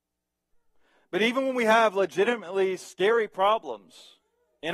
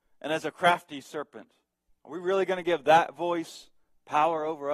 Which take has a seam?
second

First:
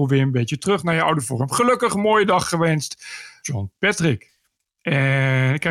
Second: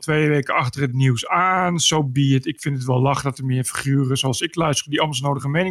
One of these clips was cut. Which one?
first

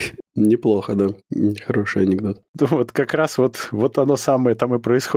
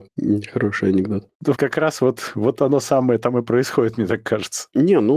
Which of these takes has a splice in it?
second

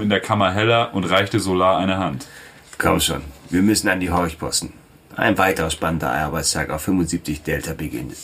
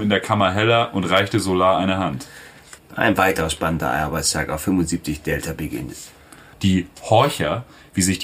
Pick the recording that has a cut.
second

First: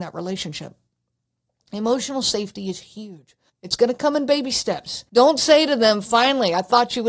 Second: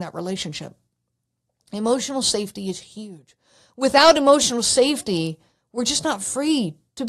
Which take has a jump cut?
first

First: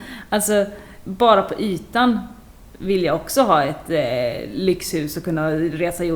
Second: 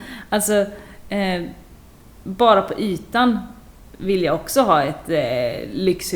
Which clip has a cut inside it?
first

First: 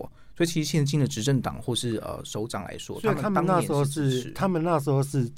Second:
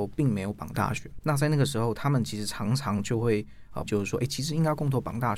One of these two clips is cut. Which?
second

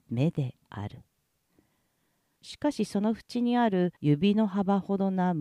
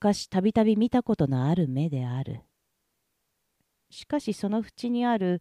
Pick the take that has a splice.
first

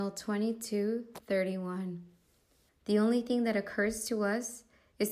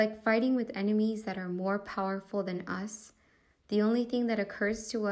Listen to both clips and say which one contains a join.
first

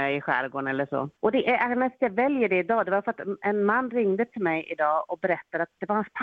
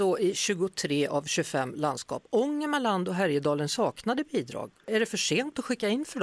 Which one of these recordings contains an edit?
first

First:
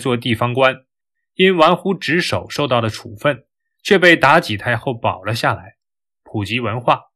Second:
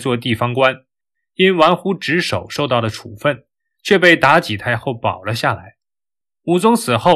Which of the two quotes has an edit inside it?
first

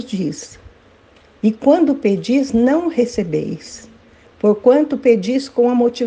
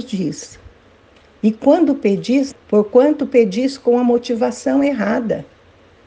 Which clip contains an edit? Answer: second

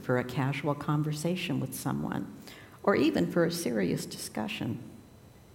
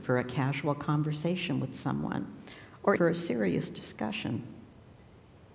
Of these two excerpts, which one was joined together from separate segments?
second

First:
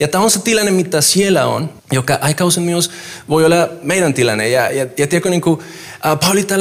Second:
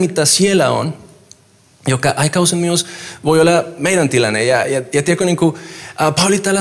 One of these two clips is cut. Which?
first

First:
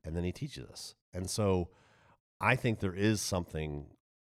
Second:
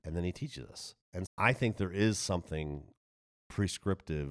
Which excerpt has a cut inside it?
second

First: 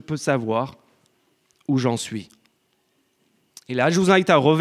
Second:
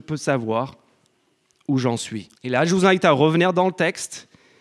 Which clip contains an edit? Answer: second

